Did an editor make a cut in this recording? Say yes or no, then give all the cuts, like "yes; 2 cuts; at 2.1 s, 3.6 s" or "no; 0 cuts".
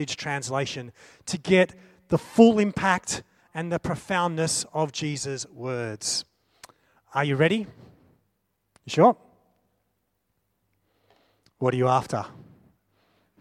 yes; 1 cut; at 3.4 s